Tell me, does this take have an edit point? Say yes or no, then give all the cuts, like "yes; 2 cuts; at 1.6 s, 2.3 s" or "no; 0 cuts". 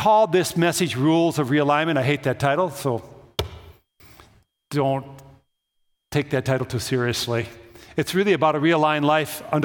no; 0 cuts